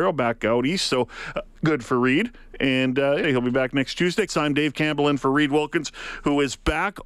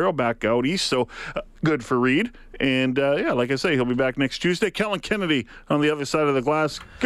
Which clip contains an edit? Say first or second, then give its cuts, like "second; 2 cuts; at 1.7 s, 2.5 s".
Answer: first; 2 cuts; at 3.2 s, 4.3 s